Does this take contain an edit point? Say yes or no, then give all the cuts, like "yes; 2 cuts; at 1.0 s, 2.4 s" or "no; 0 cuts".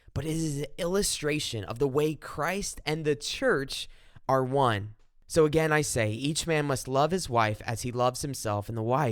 no; 0 cuts